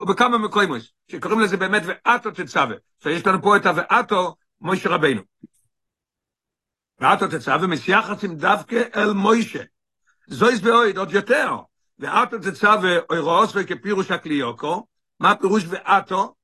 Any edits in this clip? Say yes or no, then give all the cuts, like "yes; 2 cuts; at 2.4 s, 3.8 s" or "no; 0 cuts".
no; 0 cuts